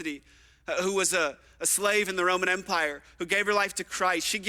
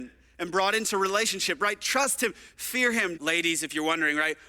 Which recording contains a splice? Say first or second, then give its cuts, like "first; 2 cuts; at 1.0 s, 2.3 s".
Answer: second; 1 cut; at 3.2 s